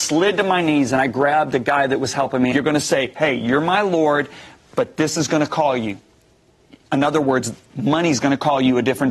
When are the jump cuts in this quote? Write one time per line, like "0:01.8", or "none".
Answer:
0:02.5